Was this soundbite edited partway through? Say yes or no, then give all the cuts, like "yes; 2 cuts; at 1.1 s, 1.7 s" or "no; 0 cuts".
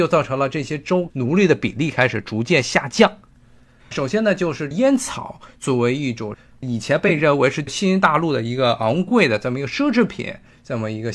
yes; 1 cut; at 3.8 s